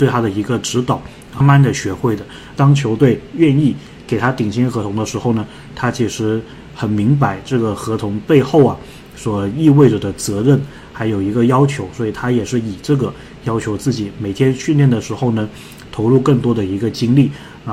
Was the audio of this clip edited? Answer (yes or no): yes